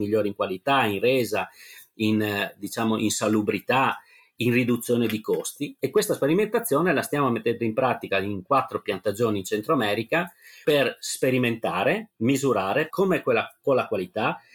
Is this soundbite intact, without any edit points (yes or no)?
no